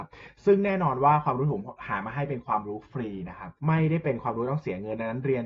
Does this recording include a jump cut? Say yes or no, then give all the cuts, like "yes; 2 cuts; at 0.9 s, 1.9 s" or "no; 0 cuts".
yes; 1 cut; at 3.6 s